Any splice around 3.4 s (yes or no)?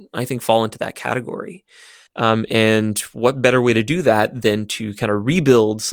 no